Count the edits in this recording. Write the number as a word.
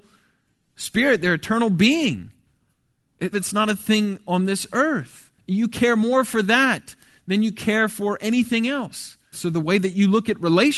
two